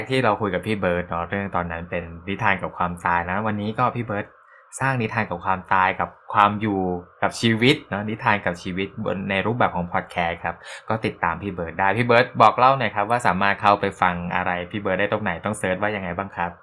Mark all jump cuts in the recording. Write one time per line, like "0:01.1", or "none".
none